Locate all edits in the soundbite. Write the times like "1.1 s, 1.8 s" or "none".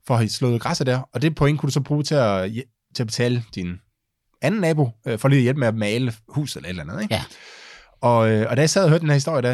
none